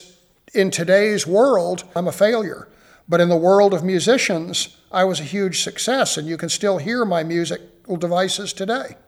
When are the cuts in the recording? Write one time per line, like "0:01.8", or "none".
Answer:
0:02.0